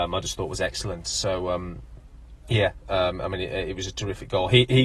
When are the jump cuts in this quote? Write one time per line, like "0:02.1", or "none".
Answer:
none